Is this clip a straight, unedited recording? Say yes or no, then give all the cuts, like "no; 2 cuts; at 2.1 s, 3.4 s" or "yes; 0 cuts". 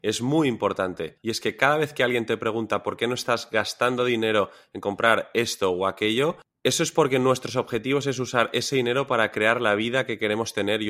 no; 1 cut; at 1.2 s